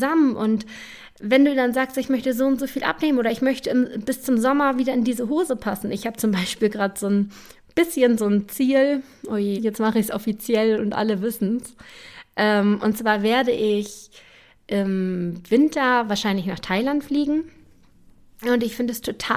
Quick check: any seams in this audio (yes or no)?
yes